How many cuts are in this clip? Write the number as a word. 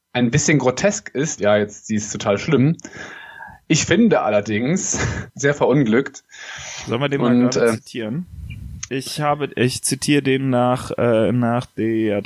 three